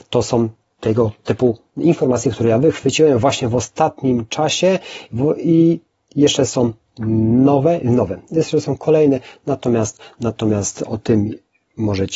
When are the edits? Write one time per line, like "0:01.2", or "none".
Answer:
none